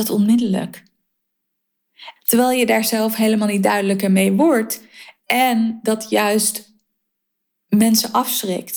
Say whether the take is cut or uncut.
cut